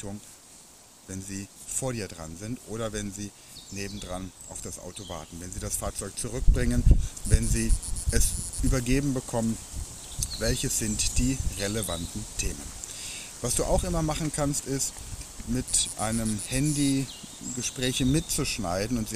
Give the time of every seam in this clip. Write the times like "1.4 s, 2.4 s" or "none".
none